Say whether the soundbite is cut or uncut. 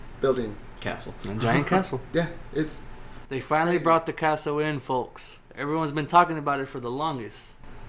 cut